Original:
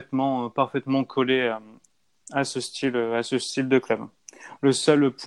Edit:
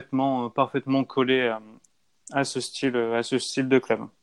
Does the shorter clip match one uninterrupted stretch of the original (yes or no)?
yes